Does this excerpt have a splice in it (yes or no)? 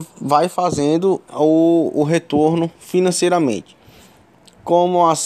yes